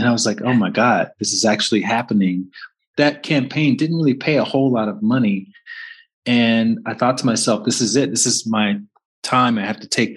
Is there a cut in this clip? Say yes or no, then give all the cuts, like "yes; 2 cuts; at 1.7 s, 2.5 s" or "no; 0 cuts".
no; 0 cuts